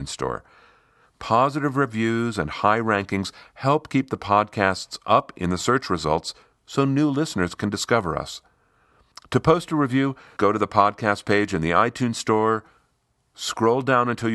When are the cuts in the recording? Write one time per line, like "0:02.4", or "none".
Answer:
0:10.4